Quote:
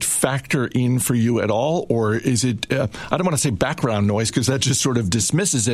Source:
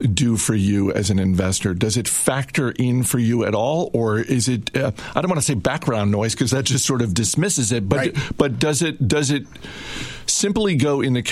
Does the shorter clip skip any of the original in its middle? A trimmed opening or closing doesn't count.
no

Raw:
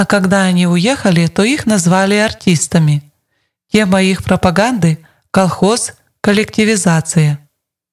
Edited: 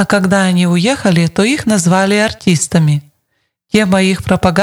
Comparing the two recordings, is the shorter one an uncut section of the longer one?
yes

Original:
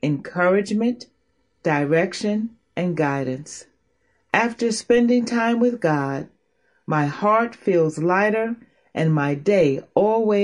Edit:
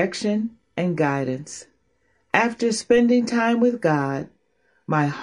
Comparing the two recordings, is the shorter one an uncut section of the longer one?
yes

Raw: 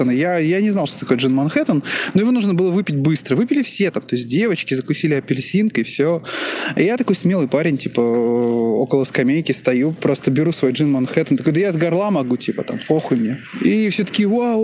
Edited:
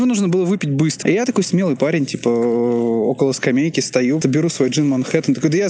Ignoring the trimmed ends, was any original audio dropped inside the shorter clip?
yes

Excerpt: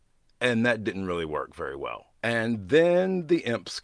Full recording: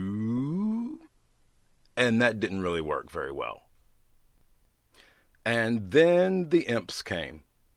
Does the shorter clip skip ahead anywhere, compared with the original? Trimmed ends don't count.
yes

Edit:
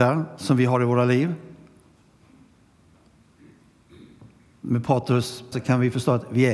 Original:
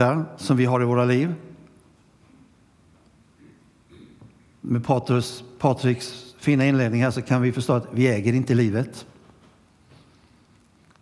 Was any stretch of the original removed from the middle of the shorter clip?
yes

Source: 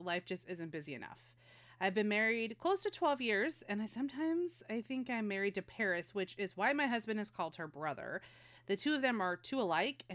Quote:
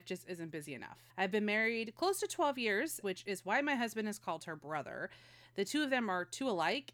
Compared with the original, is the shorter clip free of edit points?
no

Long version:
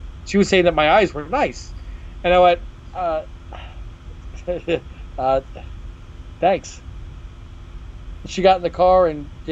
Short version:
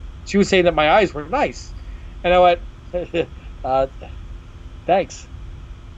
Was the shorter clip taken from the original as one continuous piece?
no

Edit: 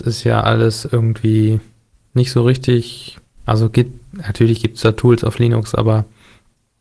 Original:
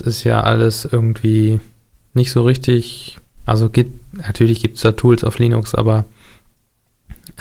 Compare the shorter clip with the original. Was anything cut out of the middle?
no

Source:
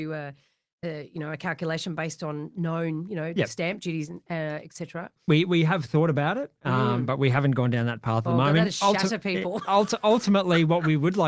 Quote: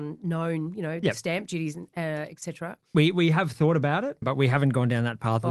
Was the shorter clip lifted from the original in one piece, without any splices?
no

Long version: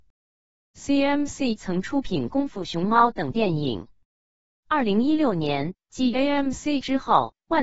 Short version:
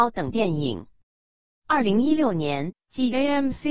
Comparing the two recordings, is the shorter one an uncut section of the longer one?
yes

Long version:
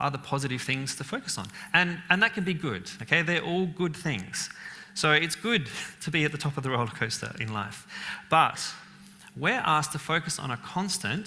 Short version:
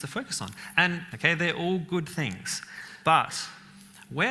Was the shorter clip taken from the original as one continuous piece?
no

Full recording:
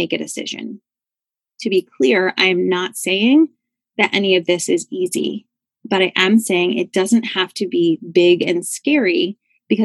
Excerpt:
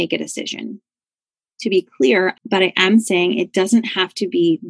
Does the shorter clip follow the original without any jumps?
no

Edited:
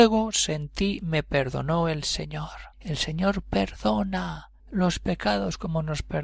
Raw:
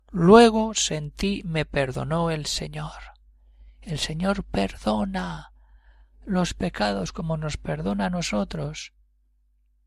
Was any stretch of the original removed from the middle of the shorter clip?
yes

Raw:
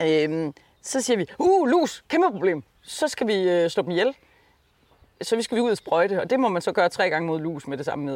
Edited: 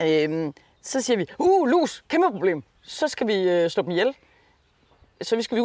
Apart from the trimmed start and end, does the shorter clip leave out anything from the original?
no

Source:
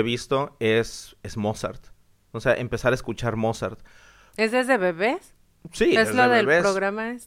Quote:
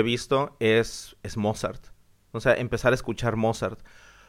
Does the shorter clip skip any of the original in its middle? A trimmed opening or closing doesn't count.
no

